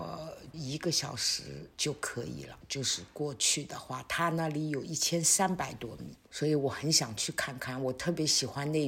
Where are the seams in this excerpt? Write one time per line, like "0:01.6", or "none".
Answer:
0:02.6